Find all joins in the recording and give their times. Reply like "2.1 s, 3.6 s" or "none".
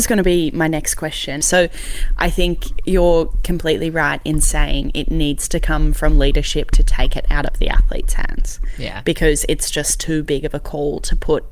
1.4 s